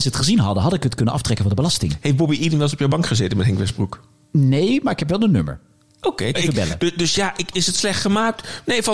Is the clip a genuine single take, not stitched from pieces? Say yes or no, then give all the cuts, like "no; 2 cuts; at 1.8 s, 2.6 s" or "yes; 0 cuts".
no; 2 cuts; at 6.3 s, 7.5 s